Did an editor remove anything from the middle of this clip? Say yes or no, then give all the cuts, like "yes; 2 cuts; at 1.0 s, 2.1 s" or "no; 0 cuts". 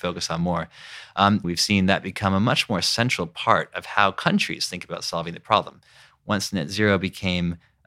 yes; 2 cuts; at 1.4 s, 6.1 s